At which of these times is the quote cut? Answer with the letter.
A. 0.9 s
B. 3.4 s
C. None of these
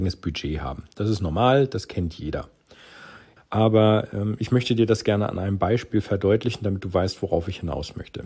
B